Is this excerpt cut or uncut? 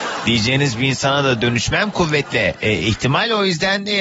uncut